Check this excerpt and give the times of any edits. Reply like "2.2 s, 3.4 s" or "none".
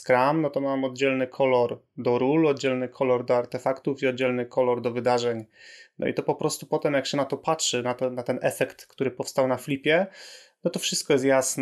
none